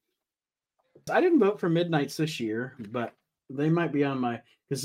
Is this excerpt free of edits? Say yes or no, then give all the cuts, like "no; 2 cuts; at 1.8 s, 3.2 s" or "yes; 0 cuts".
no; 1 cut; at 1.1 s